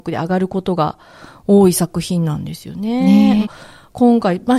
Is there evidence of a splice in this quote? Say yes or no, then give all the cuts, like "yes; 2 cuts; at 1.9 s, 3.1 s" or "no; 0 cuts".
yes; 1 cut; at 3.4 s